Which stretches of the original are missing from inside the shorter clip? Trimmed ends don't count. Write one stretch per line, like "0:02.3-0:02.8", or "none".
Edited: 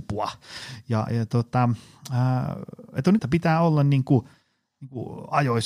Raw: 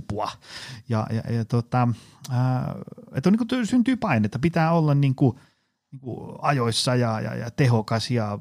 0:01.1-0:01.3
0:03.4-0:04.3